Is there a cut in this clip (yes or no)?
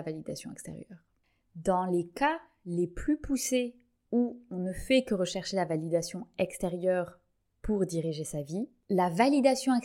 no